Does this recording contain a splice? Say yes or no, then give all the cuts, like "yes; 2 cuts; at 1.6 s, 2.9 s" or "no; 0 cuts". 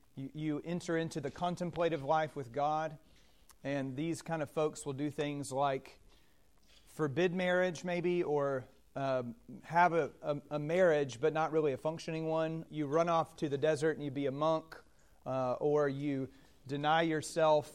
yes; 2 cuts; at 9.6 s, 12.7 s